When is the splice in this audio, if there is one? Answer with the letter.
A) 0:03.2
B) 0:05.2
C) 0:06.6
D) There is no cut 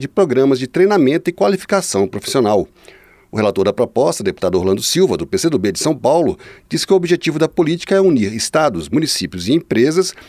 D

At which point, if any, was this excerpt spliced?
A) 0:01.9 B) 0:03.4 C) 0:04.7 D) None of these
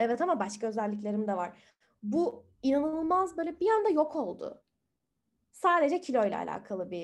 D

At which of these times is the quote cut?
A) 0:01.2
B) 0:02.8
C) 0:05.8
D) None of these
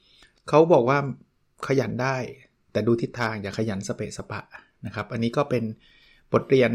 D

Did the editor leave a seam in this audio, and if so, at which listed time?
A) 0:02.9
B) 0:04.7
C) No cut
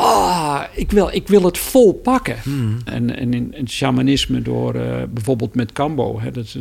A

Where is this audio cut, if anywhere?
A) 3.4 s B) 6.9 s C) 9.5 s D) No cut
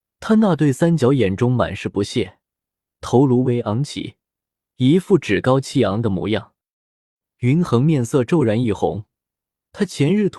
A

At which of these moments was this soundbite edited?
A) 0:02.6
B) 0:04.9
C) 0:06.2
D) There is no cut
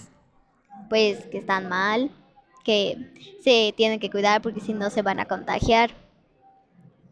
D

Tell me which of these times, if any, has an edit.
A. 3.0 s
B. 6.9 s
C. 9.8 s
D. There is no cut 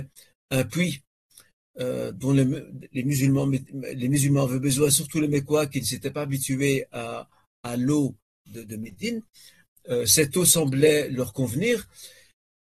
D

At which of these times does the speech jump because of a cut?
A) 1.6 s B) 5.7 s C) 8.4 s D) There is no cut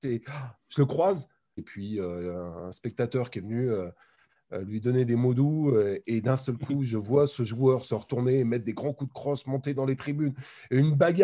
A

